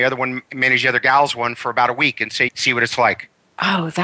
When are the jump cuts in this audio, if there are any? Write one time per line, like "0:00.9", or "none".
0:02.5